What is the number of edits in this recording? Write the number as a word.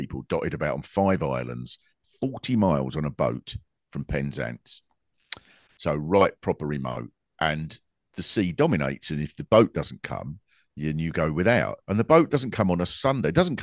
one